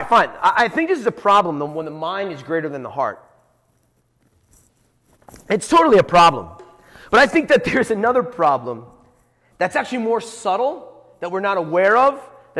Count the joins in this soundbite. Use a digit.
0